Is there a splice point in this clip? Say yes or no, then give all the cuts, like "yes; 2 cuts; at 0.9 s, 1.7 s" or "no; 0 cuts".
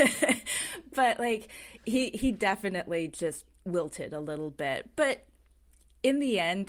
no; 0 cuts